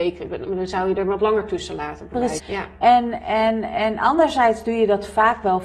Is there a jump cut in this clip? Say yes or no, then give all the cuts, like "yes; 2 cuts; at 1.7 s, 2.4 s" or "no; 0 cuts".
yes; 1 cut; at 2.4 s